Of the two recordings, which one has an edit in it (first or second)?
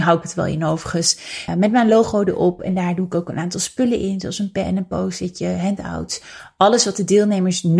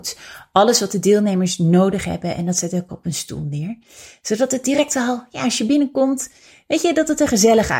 first